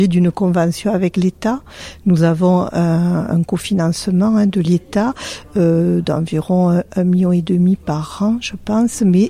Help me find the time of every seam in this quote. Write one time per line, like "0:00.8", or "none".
none